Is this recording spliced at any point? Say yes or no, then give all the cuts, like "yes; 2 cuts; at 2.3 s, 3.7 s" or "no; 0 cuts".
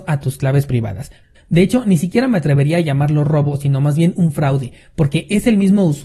yes; 1 cut; at 1.4 s